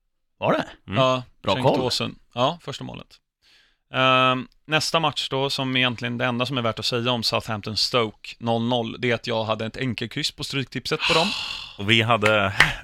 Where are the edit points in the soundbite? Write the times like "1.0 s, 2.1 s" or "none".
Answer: none